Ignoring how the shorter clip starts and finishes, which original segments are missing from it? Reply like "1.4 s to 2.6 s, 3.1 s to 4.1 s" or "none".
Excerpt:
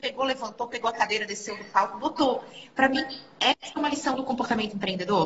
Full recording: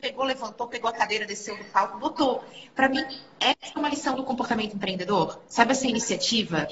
none